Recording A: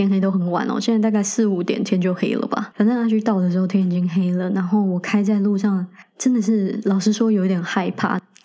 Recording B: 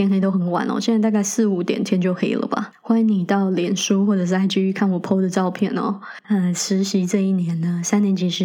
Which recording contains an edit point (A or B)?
B